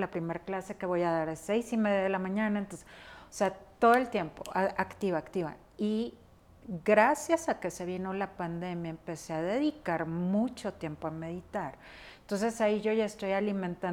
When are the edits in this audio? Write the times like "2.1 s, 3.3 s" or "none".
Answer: none